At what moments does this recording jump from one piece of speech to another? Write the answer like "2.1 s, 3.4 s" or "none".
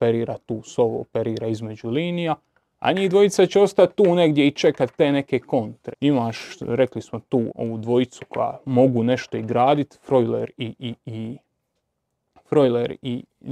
5.9 s, 7.5 s